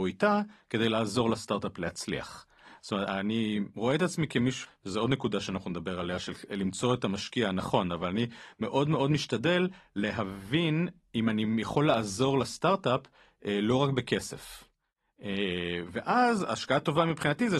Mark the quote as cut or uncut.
cut